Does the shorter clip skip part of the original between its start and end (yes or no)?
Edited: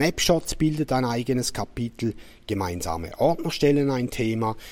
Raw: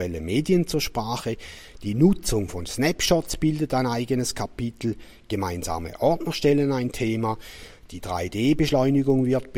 no